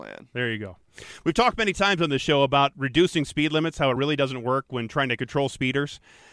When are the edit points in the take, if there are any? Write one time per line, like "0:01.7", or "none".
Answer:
none